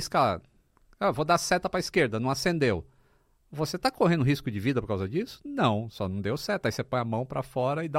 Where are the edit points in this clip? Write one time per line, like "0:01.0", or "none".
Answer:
none